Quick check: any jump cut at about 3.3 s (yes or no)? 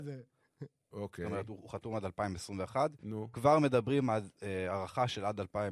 yes